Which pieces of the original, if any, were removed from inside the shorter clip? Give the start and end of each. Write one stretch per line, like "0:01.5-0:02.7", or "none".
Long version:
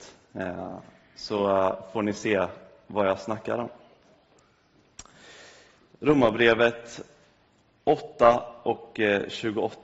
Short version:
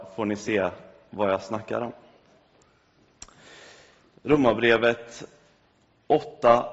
none